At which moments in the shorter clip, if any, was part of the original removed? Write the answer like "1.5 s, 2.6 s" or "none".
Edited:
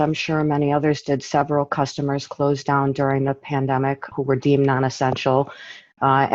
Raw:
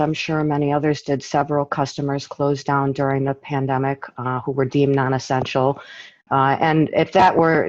4.1 s